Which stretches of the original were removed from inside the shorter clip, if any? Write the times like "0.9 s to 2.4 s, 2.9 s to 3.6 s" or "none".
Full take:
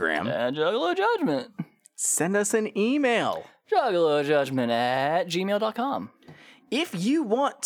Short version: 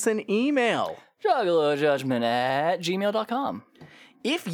none